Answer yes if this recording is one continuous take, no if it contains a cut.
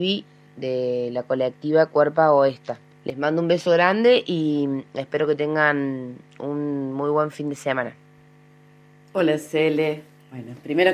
yes